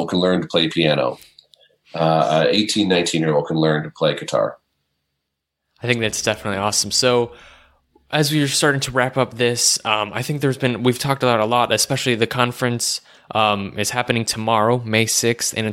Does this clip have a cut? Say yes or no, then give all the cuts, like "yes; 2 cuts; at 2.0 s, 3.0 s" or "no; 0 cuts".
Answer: no; 0 cuts